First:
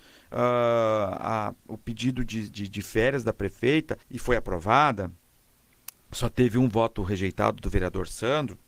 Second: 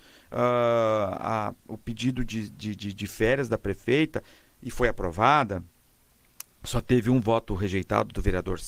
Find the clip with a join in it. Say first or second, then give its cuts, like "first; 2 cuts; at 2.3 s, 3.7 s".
first; 2 cuts; at 2.5 s, 4.0 s